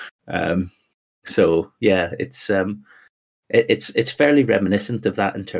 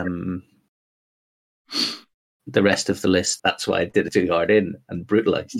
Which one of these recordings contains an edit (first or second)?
second